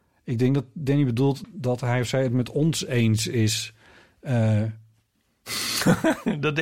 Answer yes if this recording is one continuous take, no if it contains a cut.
no